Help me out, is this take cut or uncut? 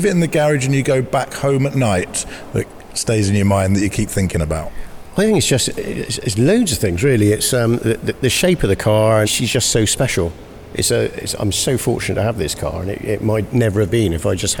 cut